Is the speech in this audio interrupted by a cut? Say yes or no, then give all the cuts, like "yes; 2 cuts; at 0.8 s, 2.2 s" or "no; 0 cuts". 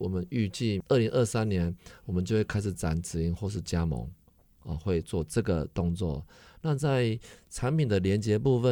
no; 0 cuts